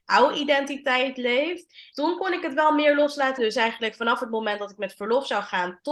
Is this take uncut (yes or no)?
no